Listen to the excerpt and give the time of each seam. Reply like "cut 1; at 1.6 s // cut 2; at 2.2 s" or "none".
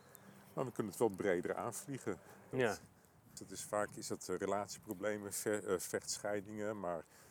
cut 1; at 2.5 s